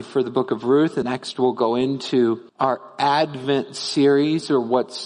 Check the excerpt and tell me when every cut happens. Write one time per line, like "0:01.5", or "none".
0:01.0
0:02.5